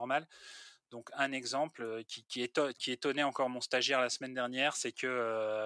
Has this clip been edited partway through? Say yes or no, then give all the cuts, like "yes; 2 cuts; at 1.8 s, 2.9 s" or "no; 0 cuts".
no; 0 cuts